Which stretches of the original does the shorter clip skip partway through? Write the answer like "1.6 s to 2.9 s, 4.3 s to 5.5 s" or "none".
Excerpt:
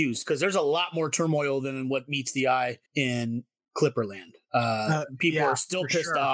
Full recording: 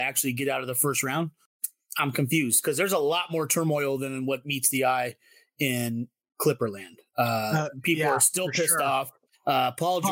5.2 s to 5.5 s